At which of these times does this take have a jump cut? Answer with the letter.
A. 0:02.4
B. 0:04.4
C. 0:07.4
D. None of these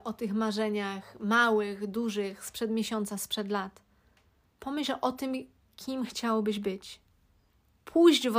B